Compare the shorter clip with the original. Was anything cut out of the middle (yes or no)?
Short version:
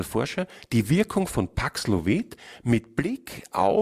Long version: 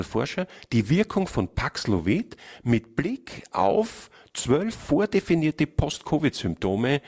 no